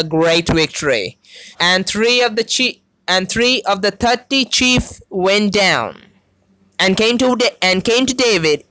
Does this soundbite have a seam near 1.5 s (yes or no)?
yes